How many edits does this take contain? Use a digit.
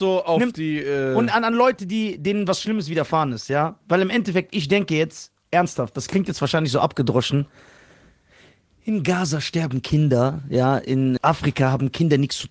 1